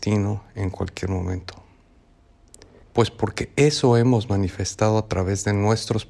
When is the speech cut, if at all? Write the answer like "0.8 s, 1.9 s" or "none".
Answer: 2.8 s